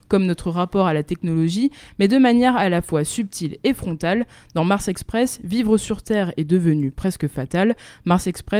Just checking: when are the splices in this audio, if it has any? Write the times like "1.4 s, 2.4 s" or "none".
none